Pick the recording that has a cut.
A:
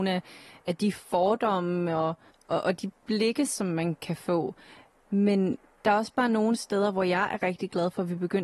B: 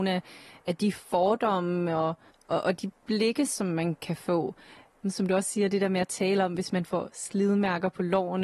B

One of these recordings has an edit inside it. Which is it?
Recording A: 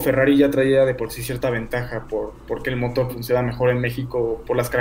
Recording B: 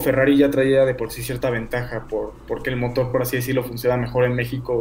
A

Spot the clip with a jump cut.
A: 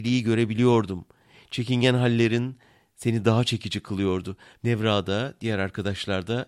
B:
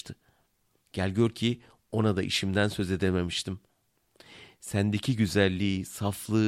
A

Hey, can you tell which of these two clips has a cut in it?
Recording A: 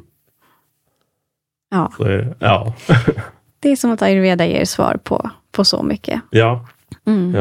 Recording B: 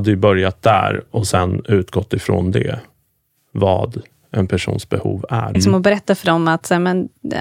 B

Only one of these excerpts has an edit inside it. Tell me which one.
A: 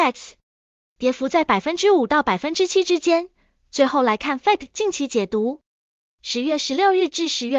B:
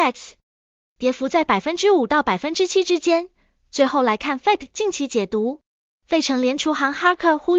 B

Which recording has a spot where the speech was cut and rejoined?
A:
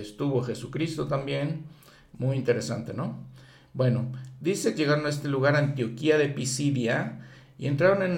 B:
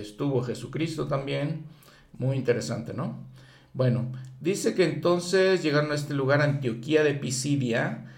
A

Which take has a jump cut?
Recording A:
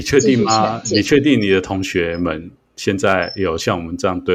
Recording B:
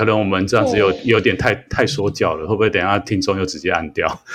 B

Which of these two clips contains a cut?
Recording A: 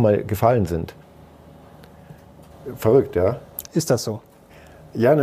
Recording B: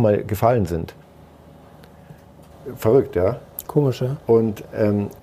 A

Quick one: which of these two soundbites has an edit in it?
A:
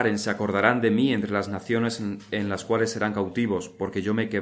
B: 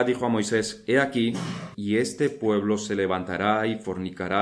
B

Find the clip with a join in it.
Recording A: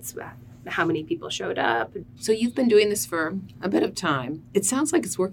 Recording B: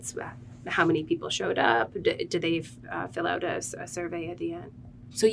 A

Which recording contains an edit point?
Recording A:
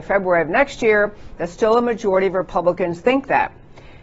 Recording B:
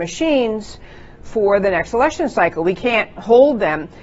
A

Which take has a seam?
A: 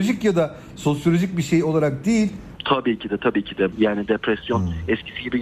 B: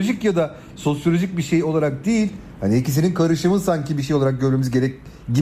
A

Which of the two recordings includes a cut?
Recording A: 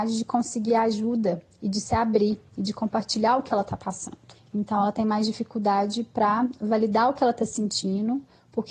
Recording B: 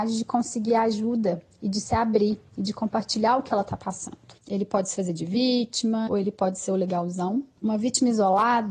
B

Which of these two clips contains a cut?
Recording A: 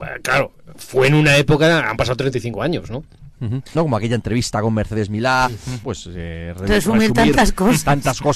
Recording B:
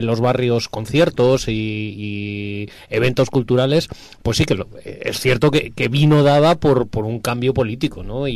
A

